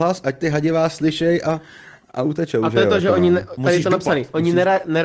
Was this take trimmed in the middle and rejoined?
no; 0 cuts

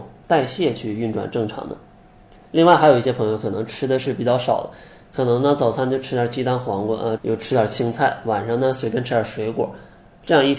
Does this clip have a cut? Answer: yes; 1 cut; at 7.2 s

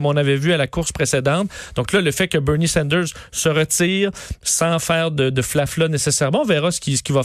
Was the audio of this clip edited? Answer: no; 0 cuts

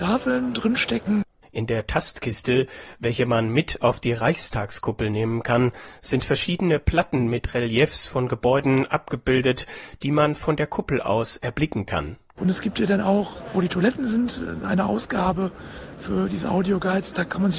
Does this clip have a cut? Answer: yes; 2 cuts; at 1.4 s, 12.4 s

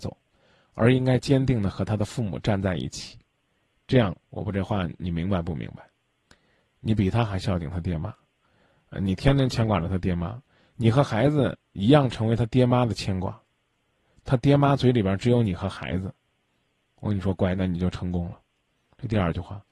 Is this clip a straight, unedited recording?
no; 1 cut; at 4.3 s

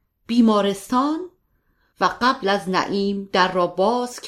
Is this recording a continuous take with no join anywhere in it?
no; 1 cut; at 1.9 s

